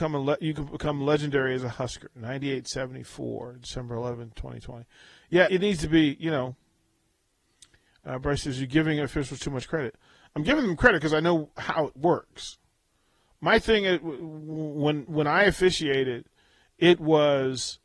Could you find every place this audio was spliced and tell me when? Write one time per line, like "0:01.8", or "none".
0:05.5